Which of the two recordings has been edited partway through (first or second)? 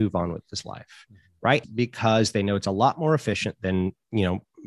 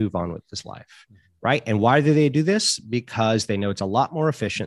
first